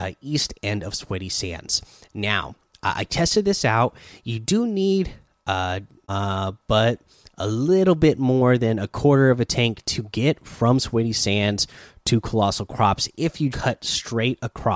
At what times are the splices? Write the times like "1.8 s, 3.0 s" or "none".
6.0 s, 13.5 s